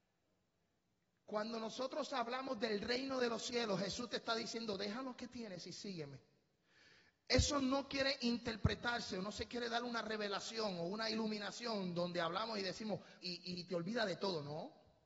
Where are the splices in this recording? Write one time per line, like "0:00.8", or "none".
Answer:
0:13.2